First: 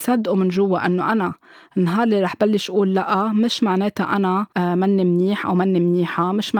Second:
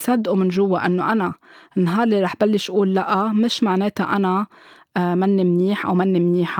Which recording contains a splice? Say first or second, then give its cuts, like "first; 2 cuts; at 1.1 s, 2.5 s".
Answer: first; 1 cut; at 4.5 s